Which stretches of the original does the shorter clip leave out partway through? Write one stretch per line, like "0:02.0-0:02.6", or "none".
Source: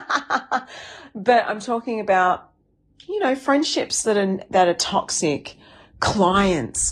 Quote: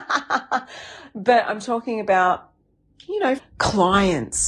0:03.4-0:05.8